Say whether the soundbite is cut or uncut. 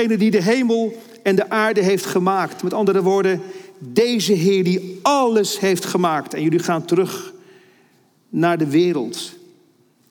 uncut